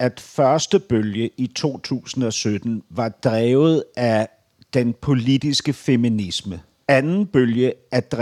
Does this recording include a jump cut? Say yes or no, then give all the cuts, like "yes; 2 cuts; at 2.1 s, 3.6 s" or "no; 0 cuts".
yes; 1 cut; at 6.8 s